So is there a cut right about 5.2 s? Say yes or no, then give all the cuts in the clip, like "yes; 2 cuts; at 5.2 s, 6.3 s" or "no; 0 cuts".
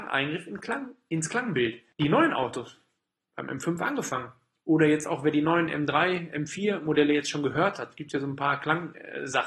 no; 0 cuts